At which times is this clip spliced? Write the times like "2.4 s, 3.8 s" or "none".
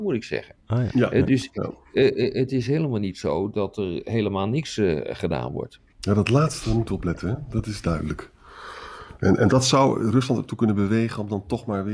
none